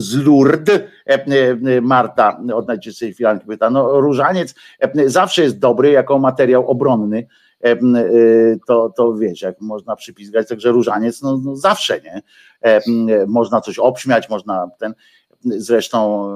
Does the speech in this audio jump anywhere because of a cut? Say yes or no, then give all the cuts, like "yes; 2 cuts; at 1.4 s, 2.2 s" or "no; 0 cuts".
no; 0 cuts